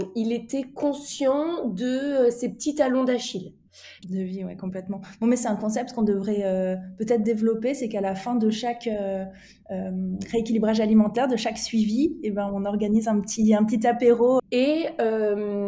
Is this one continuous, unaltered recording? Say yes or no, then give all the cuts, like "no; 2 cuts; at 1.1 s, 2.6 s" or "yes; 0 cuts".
no; 2 cuts; at 4.0 s, 14.4 s